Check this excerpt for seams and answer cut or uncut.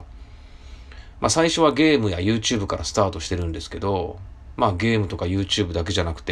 uncut